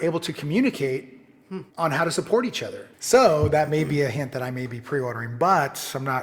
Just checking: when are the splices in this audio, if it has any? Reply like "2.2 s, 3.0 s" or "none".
1.7 s, 2.9 s